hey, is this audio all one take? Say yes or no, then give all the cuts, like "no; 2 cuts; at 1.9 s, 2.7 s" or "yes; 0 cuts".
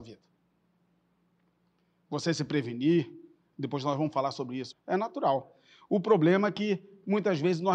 no; 1 cut; at 4.7 s